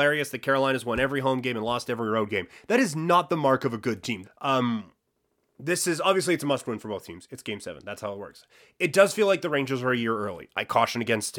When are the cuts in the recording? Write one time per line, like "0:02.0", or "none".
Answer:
0:04.2